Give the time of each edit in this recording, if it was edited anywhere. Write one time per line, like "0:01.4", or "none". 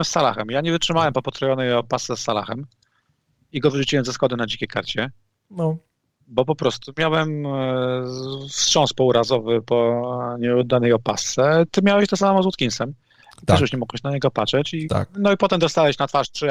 none